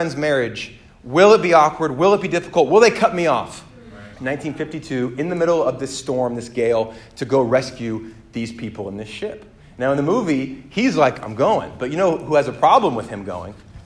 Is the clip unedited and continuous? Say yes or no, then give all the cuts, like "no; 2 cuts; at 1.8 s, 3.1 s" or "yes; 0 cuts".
no; 1 cut; at 4.1 s